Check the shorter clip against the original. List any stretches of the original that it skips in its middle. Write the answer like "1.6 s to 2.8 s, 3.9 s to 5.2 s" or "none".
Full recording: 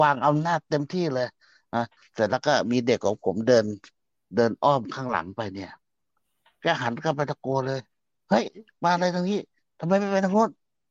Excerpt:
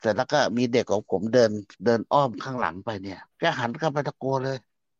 3.9 s to 4.2 s, 5.8 s to 6.5 s